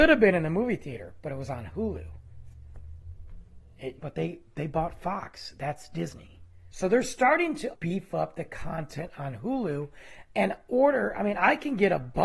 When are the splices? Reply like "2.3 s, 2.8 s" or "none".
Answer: 4.0 s, 6.7 s, 7.7 s